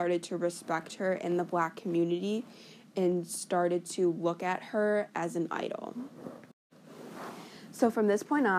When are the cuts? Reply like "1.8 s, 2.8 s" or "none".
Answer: none